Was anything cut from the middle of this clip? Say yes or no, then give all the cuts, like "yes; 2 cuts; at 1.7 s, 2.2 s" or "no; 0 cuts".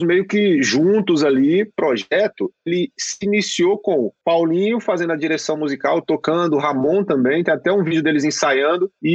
no; 0 cuts